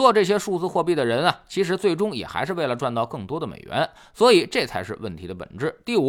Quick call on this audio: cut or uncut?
uncut